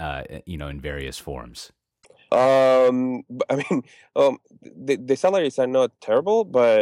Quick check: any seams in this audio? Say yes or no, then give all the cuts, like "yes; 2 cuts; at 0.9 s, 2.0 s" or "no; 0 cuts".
yes; 1 cut; at 2.3 s